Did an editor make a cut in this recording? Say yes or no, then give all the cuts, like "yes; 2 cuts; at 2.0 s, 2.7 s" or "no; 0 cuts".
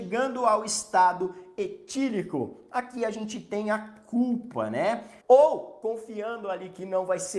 yes; 1 cut; at 5.2 s